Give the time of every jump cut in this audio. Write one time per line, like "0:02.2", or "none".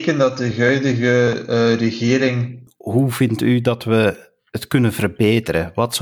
0:02.7